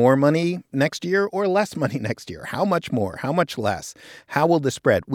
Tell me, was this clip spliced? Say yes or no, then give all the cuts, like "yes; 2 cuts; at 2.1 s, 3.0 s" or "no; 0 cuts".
no; 0 cuts